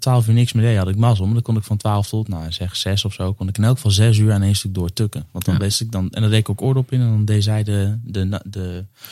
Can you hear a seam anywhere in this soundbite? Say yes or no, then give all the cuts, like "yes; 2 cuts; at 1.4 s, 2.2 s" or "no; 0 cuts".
no; 0 cuts